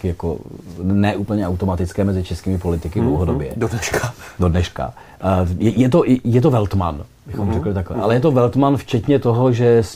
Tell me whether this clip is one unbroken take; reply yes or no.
yes